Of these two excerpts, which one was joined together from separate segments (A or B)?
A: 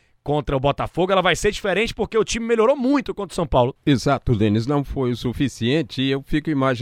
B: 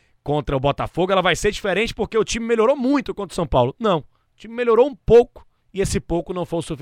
A